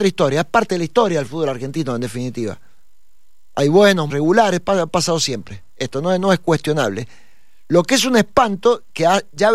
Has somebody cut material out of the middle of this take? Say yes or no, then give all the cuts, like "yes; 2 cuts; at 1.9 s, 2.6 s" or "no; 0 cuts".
yes; 1 cut; at 4.1 s